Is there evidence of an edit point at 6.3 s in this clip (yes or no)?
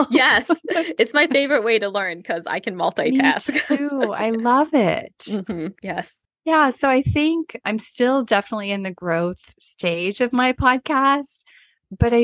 yes